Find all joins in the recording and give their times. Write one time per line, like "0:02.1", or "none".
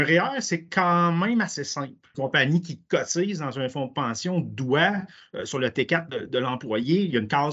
0:02.1

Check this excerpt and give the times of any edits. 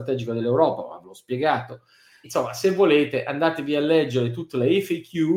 0:02.2

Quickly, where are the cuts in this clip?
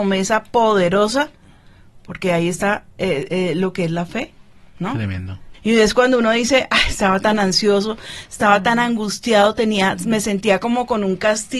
0:03.3
0:05.5

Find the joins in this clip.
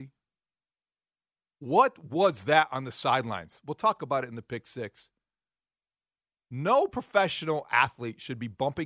0:01.5

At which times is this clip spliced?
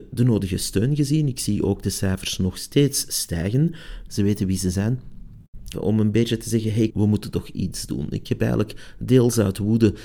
0:04.1
0:05.7
0:06.9

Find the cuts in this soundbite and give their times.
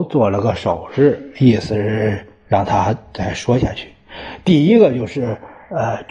none

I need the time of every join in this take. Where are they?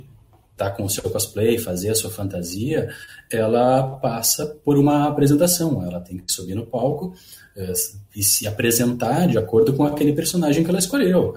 none

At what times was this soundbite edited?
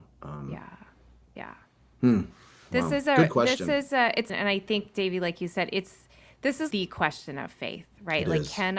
0:04.3
0:06.7

